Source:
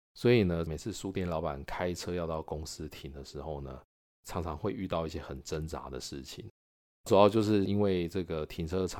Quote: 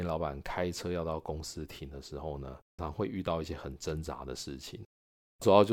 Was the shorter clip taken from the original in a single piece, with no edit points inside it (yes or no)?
no